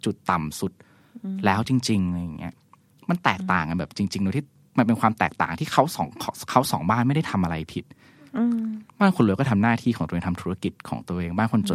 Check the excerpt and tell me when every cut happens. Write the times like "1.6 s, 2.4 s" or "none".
8.9 s